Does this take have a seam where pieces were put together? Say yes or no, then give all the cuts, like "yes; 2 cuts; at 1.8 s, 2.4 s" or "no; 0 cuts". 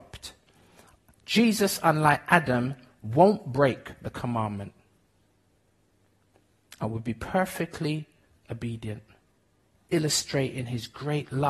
no; 0 cuts